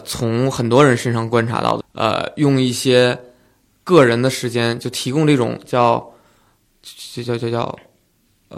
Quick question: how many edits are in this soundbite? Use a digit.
1